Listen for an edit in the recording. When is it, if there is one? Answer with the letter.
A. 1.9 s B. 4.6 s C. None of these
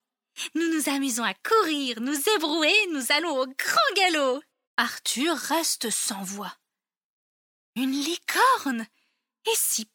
B